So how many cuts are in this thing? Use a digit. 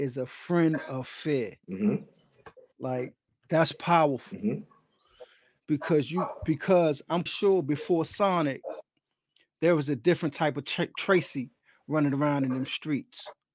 1